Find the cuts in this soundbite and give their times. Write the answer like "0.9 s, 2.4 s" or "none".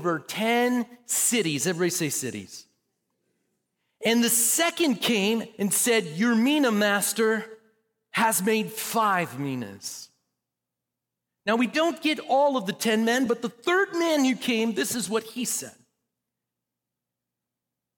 none